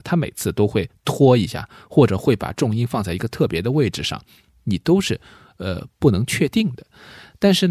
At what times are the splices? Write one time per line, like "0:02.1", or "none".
none